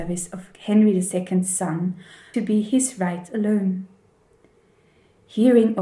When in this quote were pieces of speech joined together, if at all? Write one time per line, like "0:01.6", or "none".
0:02.3